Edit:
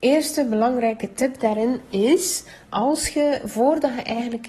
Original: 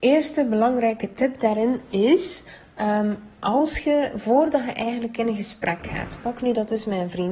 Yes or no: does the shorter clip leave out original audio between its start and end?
yes